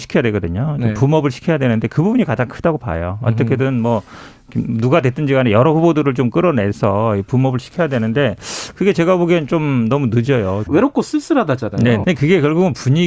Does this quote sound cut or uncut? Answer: cut